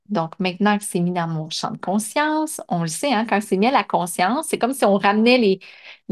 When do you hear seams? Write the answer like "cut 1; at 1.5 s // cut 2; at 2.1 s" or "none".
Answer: none